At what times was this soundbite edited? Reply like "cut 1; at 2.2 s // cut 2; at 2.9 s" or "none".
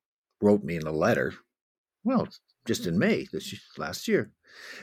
none